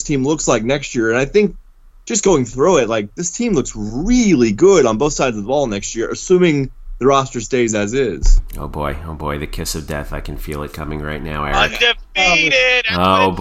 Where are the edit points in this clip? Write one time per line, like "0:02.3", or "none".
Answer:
none